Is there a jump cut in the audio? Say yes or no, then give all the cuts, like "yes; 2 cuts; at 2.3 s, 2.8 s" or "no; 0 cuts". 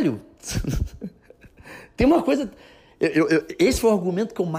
no; 0 cuts